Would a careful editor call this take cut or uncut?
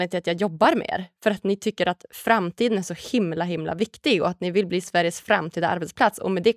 uncut